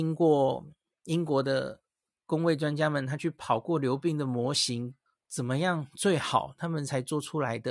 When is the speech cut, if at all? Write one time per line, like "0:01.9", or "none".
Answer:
0:05.1